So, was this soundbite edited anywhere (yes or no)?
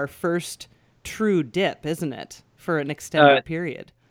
no